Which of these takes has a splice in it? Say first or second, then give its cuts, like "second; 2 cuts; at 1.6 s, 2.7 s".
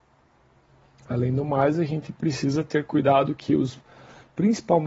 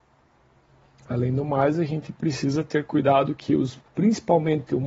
second; 1 cut; at 3.9 s